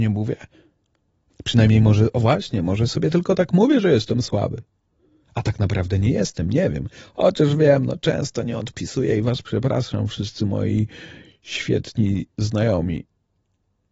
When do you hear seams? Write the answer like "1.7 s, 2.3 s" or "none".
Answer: 1.3 s